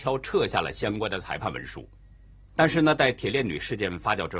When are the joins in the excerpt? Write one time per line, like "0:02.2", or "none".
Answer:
0:02.3